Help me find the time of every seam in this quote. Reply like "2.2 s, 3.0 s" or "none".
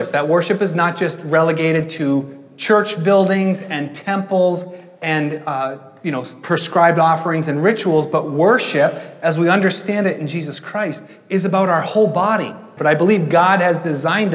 12.8 s